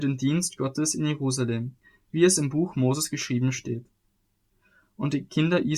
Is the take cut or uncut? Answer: cut